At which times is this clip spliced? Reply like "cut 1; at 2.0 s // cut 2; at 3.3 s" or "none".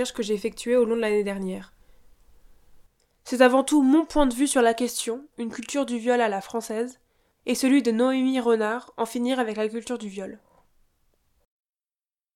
cut 1; at 5.3 s